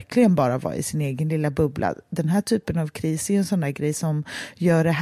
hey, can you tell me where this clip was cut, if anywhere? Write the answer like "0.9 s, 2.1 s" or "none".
none